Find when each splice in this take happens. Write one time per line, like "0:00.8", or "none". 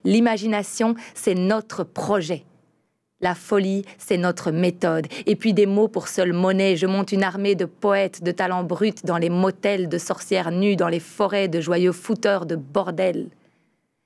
none